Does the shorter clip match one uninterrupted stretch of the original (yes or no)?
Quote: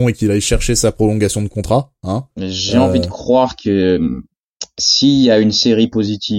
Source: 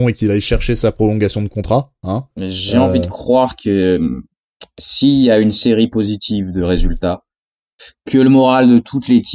yes